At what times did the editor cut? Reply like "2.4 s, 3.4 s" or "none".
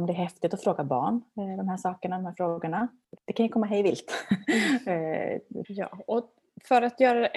3.2 s, 5.6 s